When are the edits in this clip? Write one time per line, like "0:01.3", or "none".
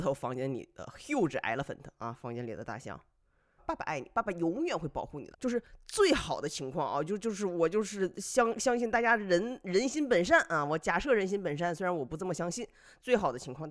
0:03.6
0:05.3